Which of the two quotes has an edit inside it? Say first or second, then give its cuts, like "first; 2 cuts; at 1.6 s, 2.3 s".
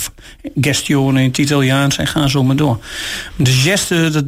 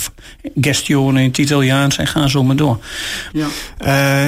second; 1 cut; at 3.3 s